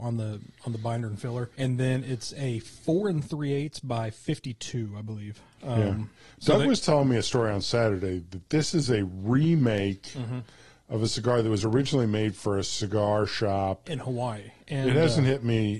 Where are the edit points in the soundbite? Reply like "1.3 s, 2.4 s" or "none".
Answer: 1.5 s, 14.6 s